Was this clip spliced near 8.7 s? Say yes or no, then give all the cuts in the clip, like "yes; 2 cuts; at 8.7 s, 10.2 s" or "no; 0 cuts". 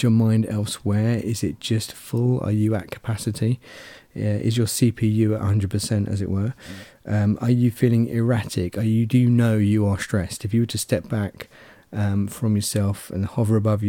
no; 0 cuts